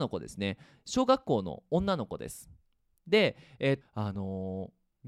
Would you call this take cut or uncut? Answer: cut